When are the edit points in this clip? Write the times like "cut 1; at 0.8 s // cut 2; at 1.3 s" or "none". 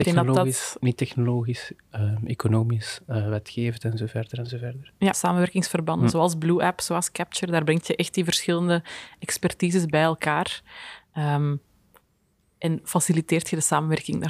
cut 1; at 5.1 s